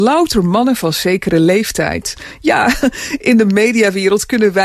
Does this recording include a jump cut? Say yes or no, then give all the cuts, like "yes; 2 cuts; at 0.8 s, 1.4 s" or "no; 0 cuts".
no; 0 cuts